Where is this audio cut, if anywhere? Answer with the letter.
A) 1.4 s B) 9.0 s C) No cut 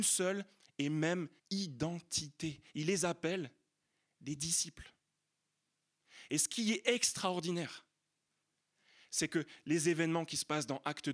A